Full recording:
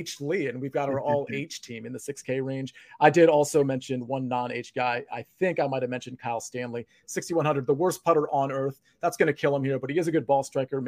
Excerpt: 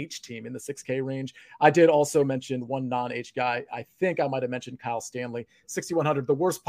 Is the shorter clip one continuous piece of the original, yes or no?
yes